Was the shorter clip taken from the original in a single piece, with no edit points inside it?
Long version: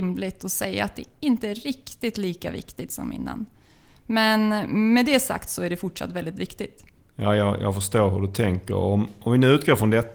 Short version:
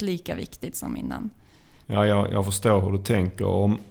no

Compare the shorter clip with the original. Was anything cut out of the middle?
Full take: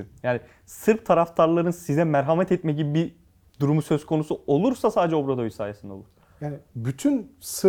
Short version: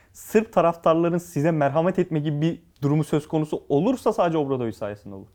yes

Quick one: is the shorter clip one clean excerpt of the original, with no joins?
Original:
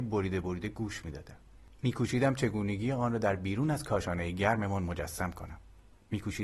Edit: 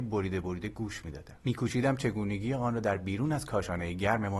no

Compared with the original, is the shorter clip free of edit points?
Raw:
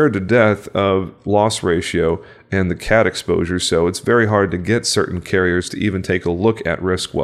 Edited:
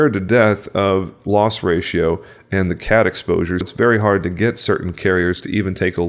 no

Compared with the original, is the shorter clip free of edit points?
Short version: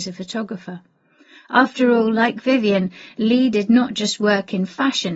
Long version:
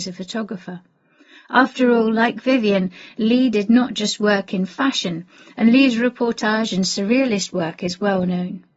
yes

